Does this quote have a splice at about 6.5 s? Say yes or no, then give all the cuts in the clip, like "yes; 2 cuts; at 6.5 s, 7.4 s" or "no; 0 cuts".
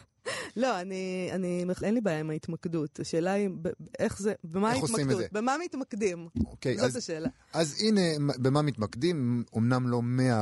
no; 1 cut; at 1.8 s